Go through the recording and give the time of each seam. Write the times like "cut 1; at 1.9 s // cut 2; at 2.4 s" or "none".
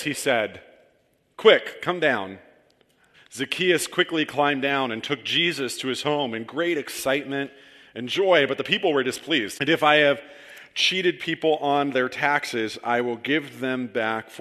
cut 1; at 3.1 s // cut 2; at 9.6 s